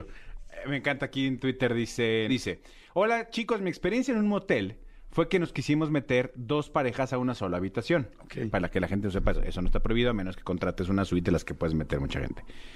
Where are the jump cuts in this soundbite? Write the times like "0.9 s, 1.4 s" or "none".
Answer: 2.3 s, 9.3 s